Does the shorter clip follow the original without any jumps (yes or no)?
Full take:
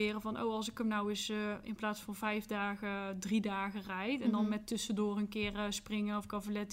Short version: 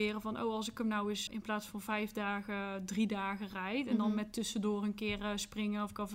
no